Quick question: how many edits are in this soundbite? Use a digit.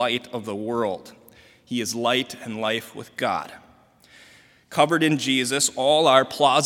0